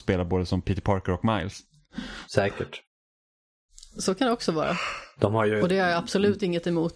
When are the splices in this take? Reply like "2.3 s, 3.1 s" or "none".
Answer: none